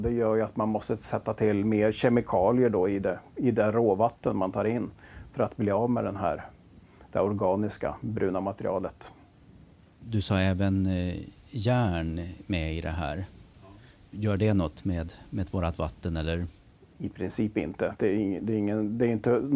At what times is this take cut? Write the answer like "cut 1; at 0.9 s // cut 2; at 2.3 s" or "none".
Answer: none